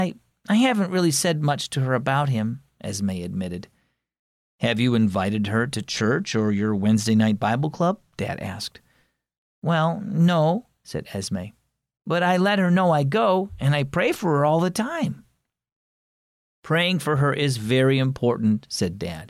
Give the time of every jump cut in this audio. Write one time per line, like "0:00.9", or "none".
none